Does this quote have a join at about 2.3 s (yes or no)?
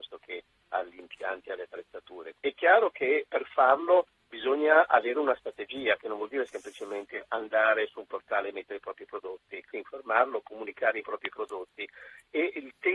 yes